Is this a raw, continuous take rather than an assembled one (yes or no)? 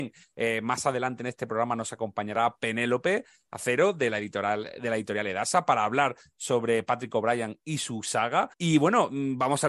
no